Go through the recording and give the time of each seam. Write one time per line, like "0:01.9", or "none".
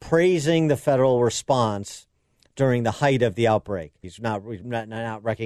0:04.0

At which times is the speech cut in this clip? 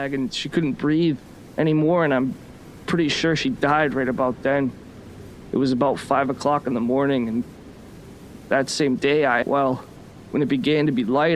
0:09.4

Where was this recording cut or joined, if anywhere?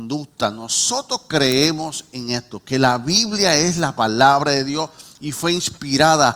none

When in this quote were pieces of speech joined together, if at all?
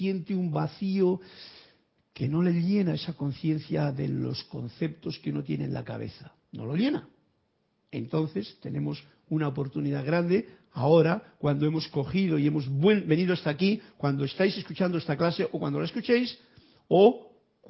none

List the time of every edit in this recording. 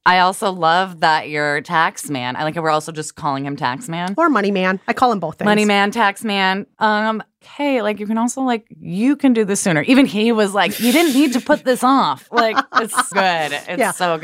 0:07.4
0:13.1

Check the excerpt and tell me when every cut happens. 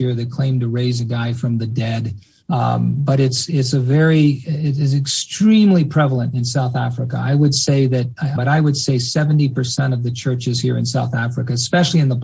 0:02.4
0:08.4

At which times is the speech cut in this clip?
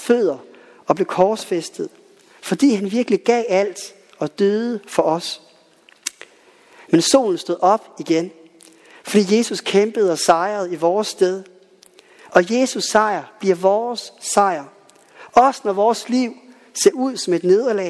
none

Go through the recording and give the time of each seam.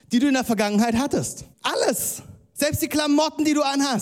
0:01.5

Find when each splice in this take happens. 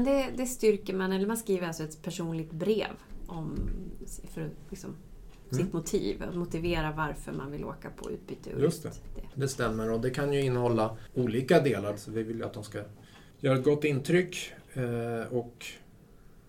0:11.9

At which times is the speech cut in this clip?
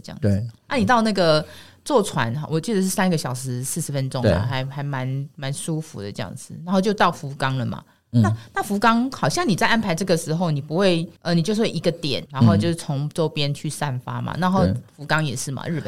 0:11.2
0:12.3

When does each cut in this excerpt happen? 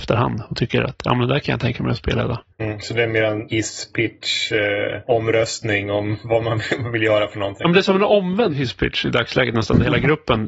0:02.5

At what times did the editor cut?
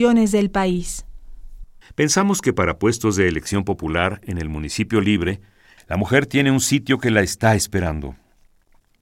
0:01.8
0:05.8

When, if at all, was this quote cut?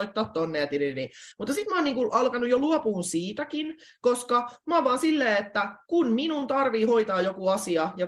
none

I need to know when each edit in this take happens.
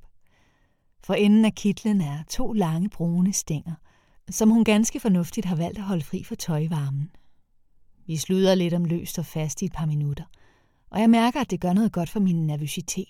none

